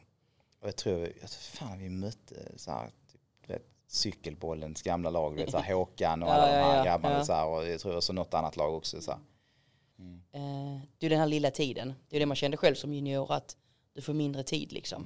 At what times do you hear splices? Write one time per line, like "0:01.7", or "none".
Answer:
0:09.9